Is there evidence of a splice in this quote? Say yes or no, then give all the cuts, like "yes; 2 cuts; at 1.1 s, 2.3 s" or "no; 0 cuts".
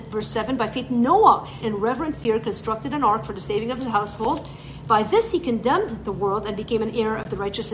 yes; 1 cut; at 1.6 s